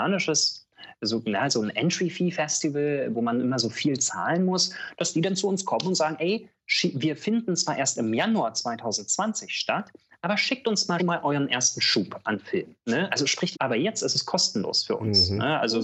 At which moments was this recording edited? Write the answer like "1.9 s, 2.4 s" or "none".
11.0 s, 13.5 s